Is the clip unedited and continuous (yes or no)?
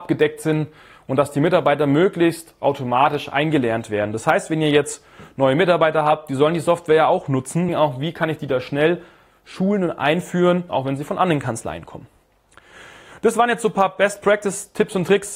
no